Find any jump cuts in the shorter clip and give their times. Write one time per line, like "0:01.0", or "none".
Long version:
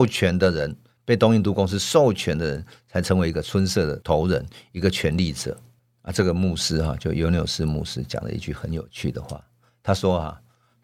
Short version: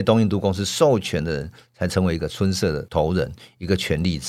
none